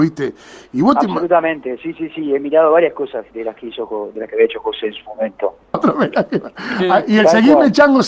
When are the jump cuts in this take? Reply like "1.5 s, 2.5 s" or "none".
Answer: 5.7 s